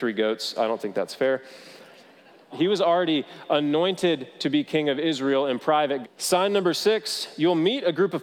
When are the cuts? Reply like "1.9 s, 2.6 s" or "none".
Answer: 2.5 s, 6.0 s